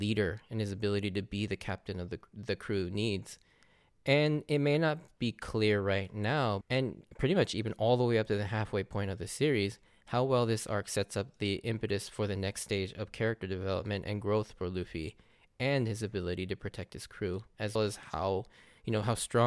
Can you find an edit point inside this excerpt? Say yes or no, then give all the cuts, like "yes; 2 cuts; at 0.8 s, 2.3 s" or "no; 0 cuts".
yes; 2 cuts; at 6.6 s, 17.8 s